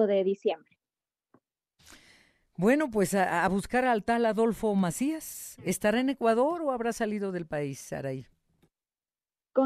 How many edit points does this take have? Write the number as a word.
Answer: zero